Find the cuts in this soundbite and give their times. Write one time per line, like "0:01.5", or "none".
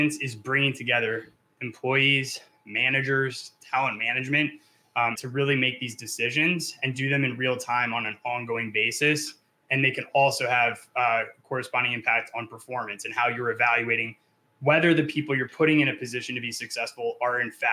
0:05.2